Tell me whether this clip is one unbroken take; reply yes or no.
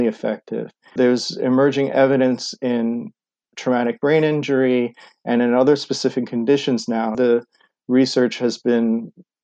no